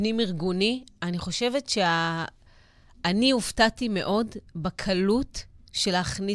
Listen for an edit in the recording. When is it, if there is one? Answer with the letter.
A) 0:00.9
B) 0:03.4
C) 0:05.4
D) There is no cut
D